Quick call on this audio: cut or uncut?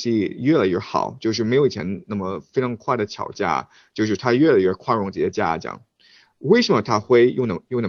uncut